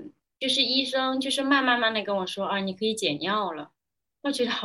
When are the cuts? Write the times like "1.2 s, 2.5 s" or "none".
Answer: 1.8 s